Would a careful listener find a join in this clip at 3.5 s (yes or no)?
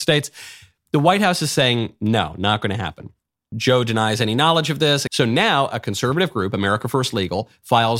yes